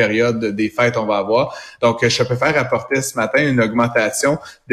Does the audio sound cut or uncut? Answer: uncut